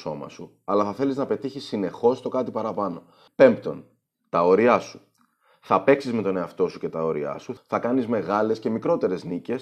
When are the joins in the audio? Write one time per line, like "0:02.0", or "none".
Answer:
0:03.3
0:07.6